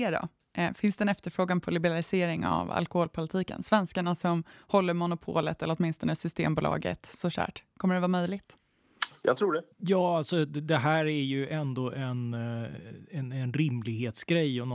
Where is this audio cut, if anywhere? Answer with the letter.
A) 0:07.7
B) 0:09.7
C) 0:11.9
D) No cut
B